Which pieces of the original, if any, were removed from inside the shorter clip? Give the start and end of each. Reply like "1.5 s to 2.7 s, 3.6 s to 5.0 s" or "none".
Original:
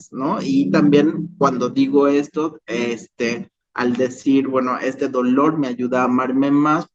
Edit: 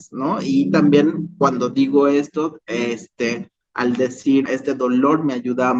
4.5 s to 4.8 s